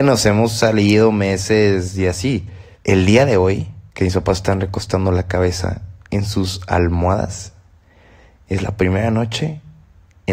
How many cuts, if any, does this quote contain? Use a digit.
3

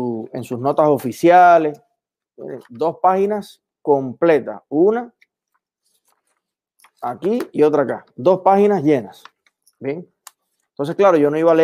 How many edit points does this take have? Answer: 0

